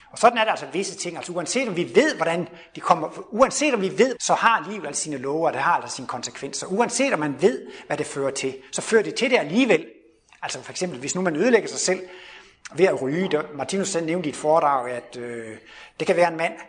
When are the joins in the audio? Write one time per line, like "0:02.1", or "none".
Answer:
0:04.2